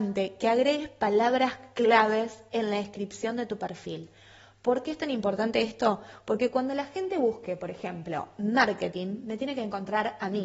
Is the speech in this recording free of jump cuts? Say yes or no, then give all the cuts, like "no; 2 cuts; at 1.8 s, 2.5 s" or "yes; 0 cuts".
yes; 0 cuts